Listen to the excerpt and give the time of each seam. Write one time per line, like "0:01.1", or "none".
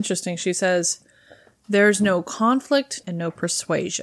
0:03.0